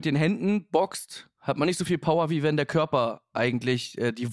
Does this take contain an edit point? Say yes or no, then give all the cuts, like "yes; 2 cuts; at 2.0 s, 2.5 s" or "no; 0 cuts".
no; 0 cuts